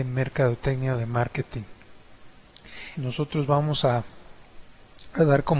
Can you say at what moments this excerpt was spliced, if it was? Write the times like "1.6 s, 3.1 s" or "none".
2.9 s